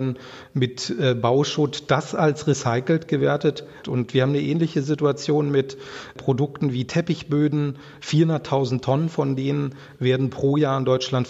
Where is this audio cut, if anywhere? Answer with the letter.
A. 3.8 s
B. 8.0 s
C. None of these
A